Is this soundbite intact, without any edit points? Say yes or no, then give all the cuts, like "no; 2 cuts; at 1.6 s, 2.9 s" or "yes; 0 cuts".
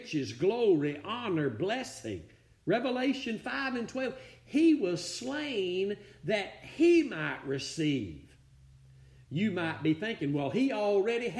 yes; 0 cuts